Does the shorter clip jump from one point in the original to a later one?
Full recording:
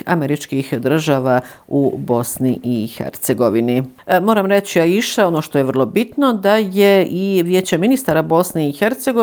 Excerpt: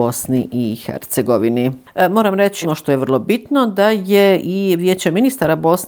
yes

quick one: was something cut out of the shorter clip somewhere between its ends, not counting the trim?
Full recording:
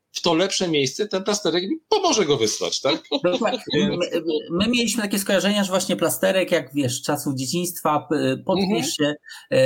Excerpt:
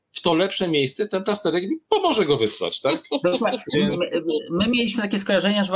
no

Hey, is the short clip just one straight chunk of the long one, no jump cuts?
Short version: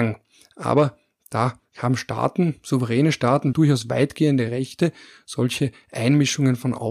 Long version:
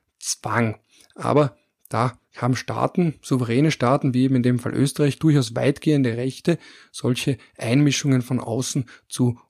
no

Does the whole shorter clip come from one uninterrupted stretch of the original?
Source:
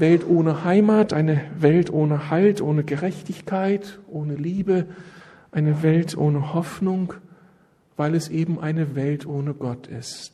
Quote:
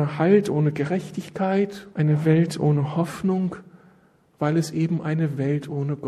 no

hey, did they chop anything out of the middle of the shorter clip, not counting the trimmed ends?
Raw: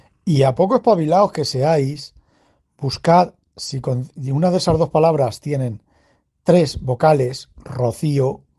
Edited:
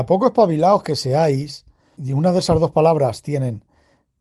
yes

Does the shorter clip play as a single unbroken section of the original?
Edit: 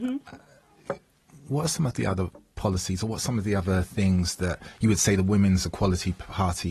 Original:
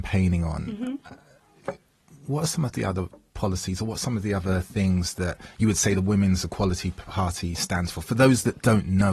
yes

